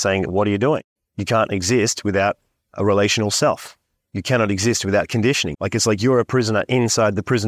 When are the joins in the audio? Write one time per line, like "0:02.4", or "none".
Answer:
0:01.0
0:05.5